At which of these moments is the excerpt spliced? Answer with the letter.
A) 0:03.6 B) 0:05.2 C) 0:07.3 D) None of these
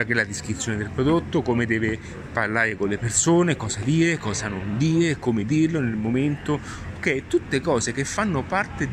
D